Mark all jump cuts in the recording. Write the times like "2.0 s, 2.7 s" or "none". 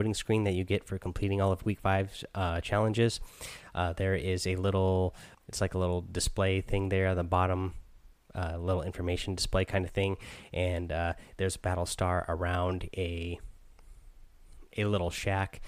5.3 s